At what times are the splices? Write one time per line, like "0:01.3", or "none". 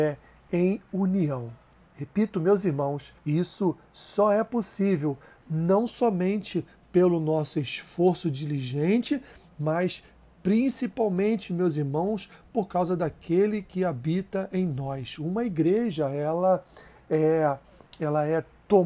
0:03.2

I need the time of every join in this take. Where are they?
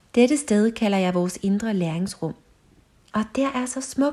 0:03.1

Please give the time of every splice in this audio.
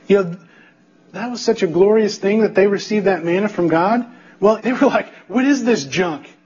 0:01.1
0:04.6

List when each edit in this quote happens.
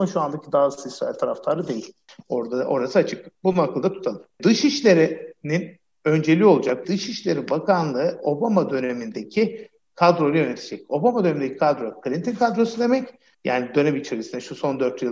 0:06.8
0:13.3

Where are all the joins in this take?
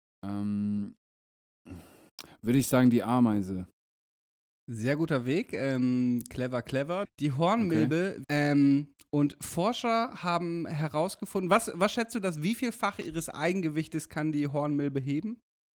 0:07.1
0:08.2

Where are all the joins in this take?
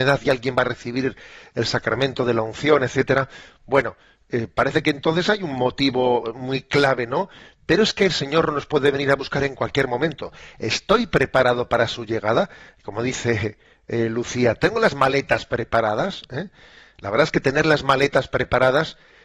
none

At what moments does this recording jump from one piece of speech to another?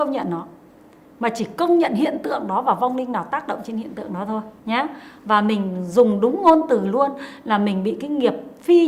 0:04.6

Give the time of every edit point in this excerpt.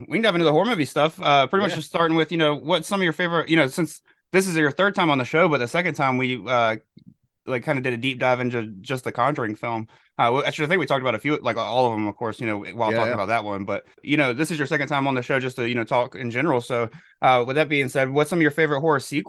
none

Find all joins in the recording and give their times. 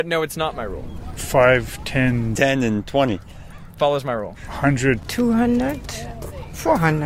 none

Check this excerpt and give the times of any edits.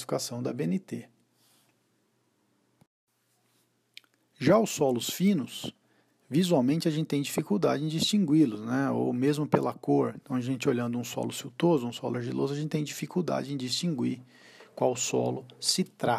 none

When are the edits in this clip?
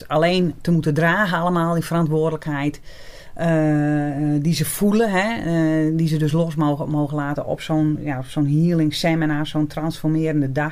none

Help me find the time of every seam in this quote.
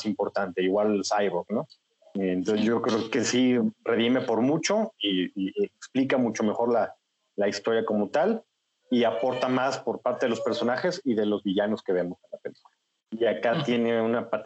0:13.1

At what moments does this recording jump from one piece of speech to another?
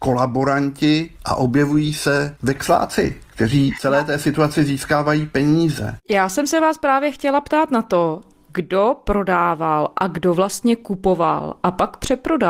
none

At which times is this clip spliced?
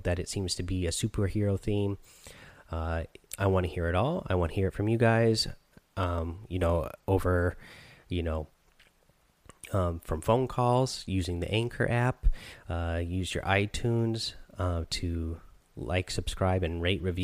0:03.3

